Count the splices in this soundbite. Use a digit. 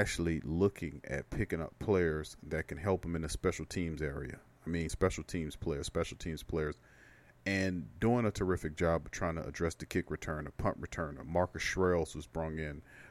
0